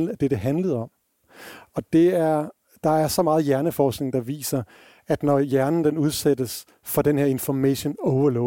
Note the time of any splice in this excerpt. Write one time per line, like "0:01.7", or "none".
0:01.7